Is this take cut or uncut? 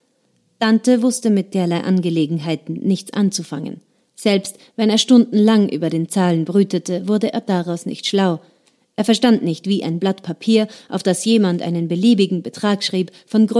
uncut